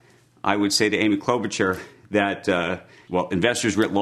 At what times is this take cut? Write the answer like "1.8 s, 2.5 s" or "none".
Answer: 3.1 s

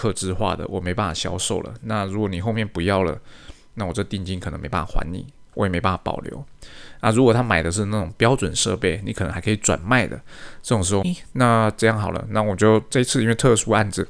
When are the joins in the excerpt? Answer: 11.0 s

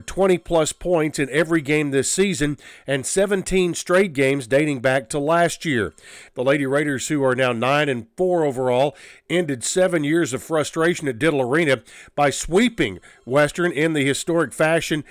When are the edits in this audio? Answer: 6.3 s

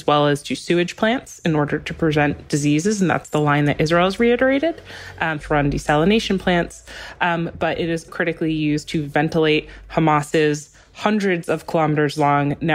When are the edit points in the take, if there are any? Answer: 5.4 s, 8.1 s

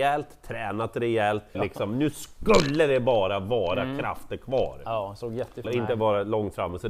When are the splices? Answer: 1.5 s, 5.6 s

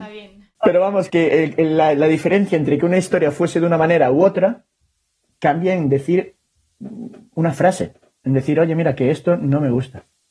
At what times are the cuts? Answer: 1.1 s

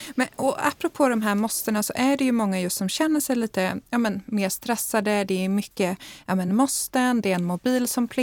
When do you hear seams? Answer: none

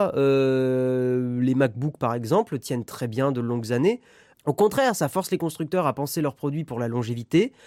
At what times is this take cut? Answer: 4.3 s

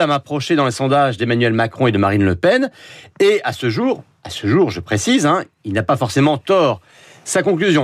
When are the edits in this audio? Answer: none

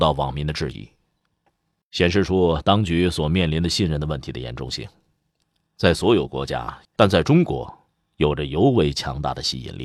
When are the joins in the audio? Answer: 1.5 s, 6.8 s

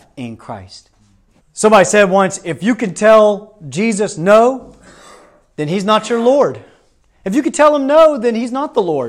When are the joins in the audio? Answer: 1.4 s

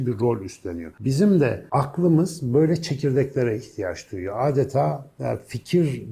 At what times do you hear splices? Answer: none

